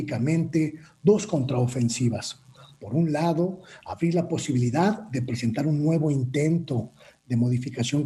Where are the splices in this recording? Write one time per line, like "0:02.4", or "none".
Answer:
none